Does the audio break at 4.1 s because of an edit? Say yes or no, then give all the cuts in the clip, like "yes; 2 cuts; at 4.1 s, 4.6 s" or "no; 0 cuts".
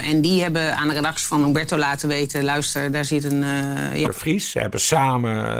yes; 1 cut; at 4.1 s